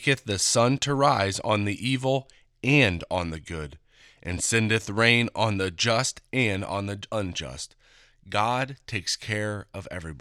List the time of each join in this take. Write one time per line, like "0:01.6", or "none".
none